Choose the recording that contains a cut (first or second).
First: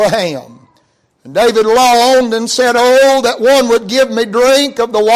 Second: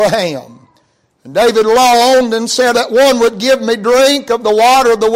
second